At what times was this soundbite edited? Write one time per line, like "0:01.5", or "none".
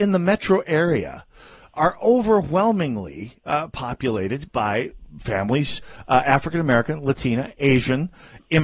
none